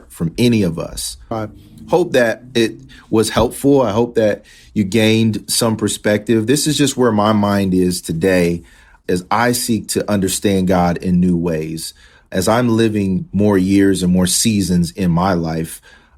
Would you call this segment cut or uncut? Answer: cut